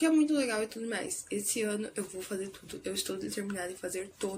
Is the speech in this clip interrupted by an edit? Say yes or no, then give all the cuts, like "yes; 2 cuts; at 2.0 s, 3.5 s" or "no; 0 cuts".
no; 0 cuts